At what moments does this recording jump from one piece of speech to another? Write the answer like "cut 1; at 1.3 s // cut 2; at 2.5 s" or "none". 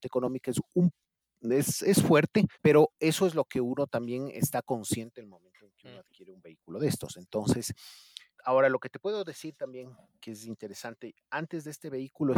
cut 1; at 2.5 s // cut 2; at 8.3 s